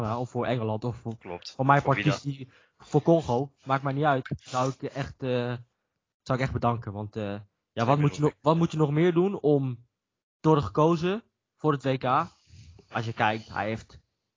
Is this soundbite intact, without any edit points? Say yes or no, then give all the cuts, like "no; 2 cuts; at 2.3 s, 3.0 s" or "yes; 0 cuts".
no; 1 cut; at 4.2 s